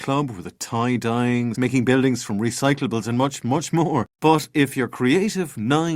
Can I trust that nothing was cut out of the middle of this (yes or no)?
no